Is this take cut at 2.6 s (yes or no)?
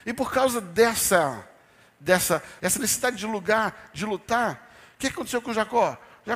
yes